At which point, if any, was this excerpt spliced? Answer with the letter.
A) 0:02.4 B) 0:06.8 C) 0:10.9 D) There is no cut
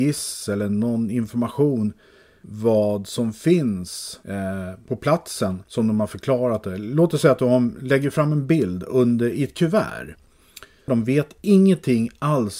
C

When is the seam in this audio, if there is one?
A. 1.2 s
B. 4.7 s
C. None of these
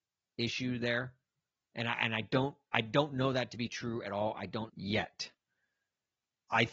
B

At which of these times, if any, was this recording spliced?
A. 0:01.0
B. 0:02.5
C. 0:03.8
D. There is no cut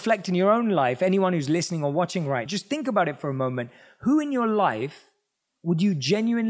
B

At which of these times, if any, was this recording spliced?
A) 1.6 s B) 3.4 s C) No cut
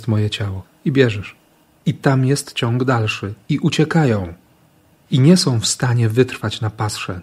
A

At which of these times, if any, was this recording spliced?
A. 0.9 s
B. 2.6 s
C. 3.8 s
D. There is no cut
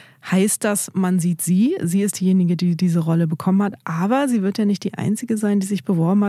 D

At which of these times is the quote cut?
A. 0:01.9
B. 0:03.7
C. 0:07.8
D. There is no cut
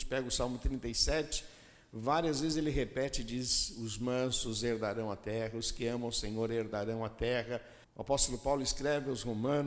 C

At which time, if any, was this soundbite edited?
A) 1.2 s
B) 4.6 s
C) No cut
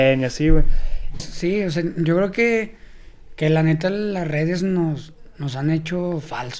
A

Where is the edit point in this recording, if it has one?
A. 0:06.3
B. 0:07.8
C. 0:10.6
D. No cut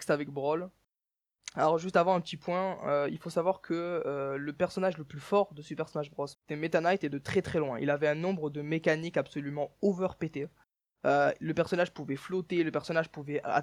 A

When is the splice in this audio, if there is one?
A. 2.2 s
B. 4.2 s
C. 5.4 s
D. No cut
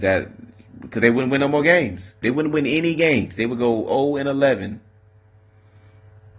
A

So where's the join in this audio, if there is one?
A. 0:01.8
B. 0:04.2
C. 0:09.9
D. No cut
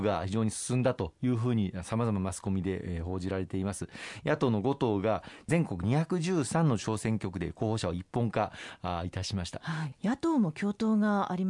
C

